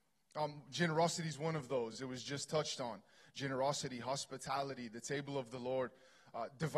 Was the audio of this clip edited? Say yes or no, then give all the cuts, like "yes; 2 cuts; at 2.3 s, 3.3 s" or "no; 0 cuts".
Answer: no; 0 cuts